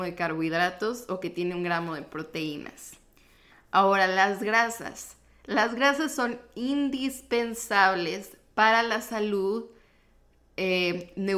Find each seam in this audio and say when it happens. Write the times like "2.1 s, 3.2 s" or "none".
none